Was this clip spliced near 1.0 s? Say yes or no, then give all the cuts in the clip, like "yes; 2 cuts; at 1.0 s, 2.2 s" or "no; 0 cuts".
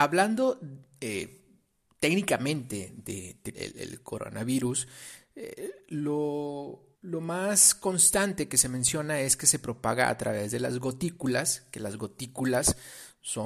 no; 2 cuts; at 3.5 s, 6.9 s